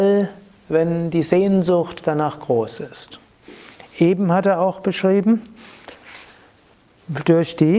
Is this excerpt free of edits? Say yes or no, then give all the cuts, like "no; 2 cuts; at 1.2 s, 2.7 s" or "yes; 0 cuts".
yes; 0 cuts